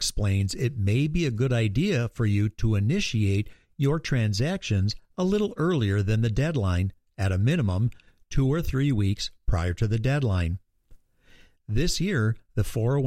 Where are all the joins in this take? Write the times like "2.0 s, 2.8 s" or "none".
none

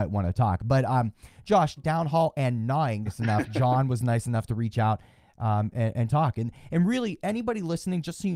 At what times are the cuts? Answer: 1.8 s, 3.1 s

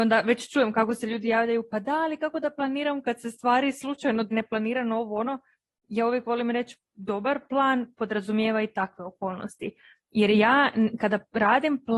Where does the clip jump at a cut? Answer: 4.3 s

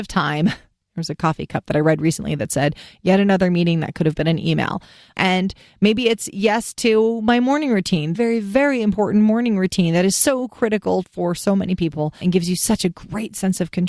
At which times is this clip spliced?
5.1 s, 8.1 s, 12.2 s

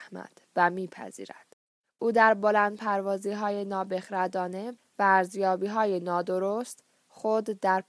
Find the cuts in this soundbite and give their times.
1.8 s

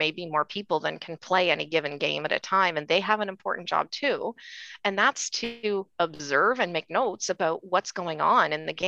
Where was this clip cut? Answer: none

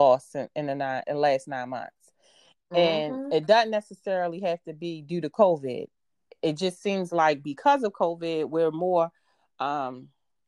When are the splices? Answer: none

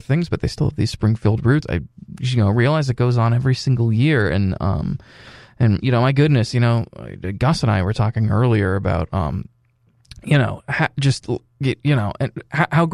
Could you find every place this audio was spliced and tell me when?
1.6 s

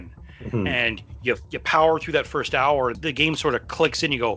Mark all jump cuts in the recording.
none

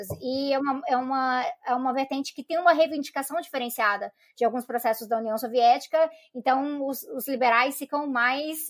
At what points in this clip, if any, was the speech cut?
none

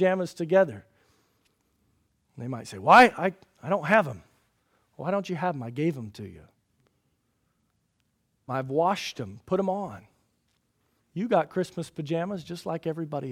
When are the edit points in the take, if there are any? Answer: 8.5 s, 11.0 s

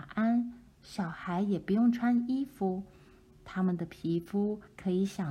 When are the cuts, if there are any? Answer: none

